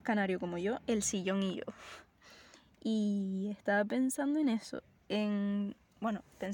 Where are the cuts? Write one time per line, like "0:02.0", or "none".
none